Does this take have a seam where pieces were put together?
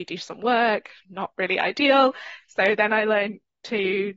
no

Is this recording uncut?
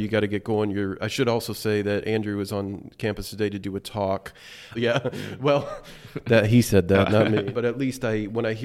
no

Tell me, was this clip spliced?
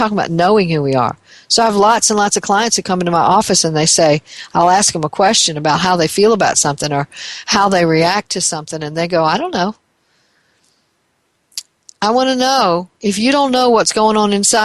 no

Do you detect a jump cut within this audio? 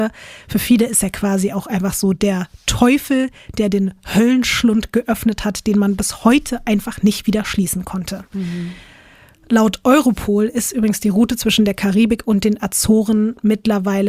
no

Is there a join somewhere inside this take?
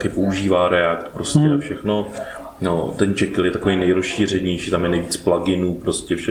no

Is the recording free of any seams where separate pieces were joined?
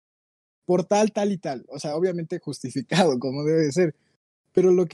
yes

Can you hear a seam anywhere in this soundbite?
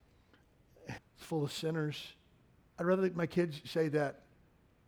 yes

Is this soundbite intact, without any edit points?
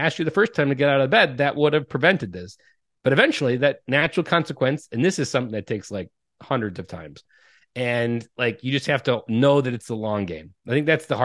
yes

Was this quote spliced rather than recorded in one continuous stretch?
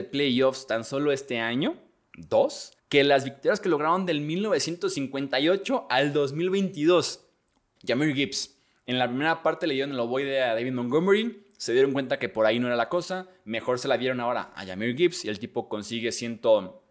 yes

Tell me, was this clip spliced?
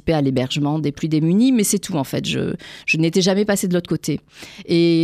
no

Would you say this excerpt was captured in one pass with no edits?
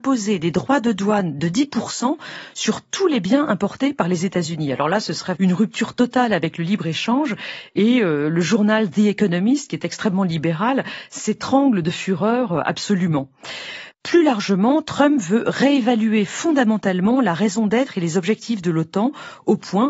no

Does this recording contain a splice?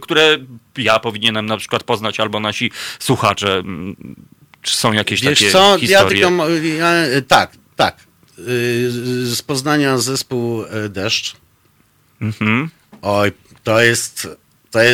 no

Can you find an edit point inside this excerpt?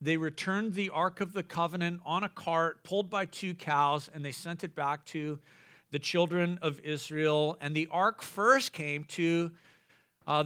no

